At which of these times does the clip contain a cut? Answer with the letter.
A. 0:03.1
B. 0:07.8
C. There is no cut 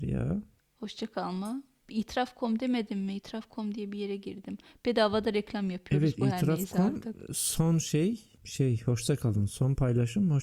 C